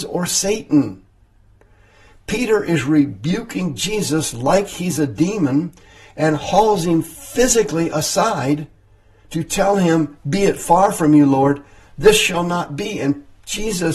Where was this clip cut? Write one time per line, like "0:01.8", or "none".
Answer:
none